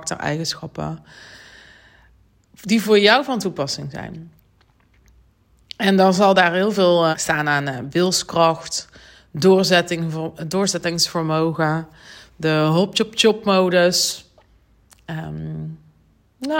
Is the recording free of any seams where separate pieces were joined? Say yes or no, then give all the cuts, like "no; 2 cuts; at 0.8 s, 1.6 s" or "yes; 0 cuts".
no; 1 cut; at 7.1 s